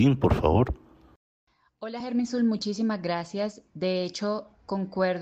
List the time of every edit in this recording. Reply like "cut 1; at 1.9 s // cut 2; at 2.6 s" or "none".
none